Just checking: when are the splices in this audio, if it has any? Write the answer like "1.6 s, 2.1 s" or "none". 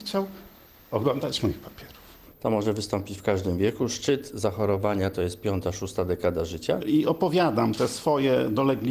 6.8 s